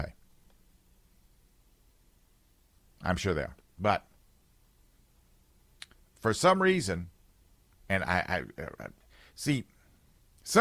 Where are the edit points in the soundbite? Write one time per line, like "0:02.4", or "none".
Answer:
none